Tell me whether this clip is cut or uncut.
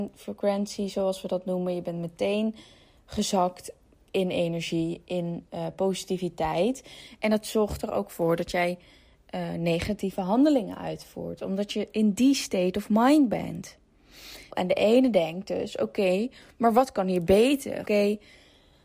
cut